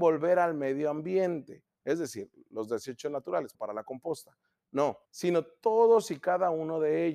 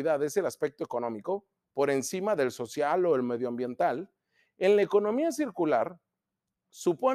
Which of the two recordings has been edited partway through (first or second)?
first